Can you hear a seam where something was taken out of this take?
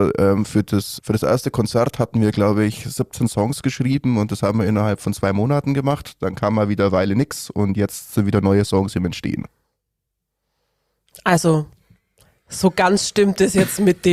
yes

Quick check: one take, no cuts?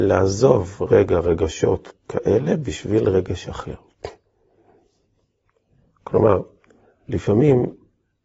yes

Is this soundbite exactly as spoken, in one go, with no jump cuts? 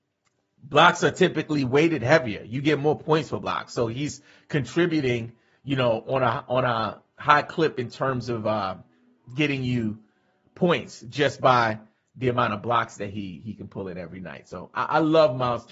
yes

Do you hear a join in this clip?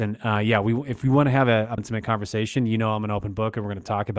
yes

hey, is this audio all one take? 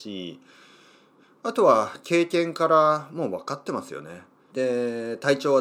no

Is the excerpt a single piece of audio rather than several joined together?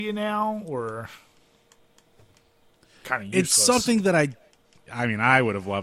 no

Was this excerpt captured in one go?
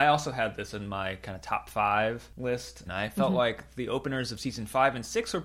no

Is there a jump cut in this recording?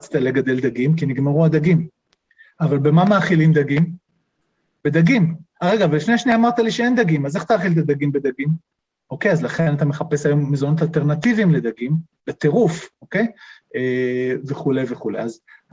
no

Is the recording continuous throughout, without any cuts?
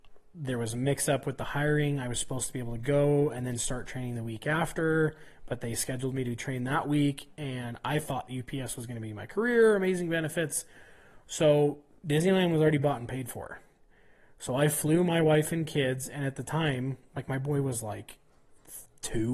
yes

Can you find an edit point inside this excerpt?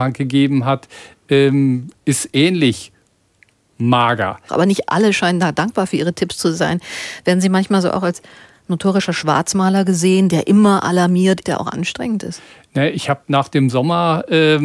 yes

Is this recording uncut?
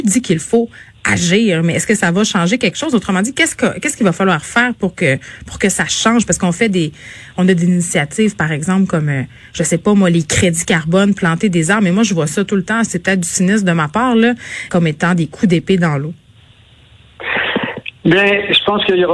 no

